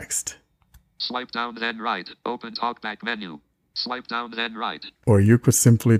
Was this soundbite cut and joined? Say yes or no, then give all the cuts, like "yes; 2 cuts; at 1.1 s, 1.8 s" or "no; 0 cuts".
yes; 1 cut; at 5.0 s